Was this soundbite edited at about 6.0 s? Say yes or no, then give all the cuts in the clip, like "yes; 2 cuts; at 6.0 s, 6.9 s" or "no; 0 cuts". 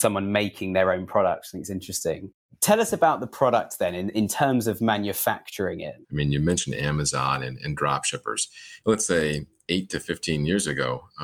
yes; 2 cuts; at 6.0 s, 8.8 s